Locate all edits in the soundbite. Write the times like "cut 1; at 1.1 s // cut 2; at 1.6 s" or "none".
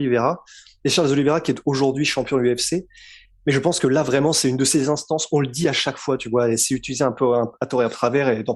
none